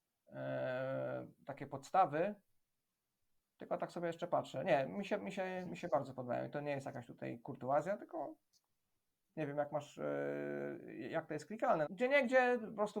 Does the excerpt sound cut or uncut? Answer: cut